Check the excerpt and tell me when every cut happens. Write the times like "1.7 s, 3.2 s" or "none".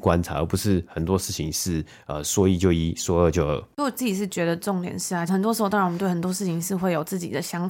5.3 s

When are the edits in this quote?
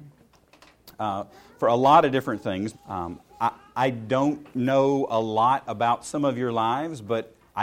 2.7 s, 4.5 s

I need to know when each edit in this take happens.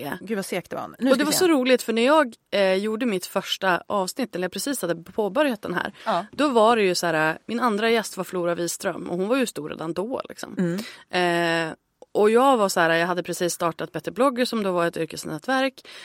7.4 s

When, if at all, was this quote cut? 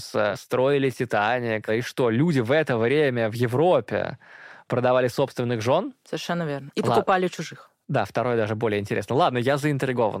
none

